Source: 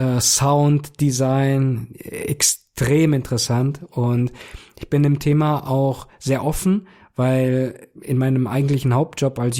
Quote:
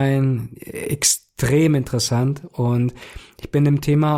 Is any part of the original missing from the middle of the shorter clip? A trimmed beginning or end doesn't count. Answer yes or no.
no